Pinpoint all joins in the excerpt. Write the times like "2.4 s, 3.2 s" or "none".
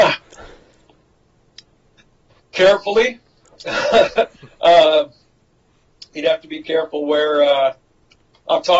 none